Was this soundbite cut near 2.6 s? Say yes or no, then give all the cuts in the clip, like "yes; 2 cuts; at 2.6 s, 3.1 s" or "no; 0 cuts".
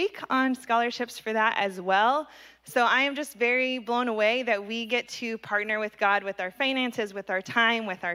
no; 0 cuts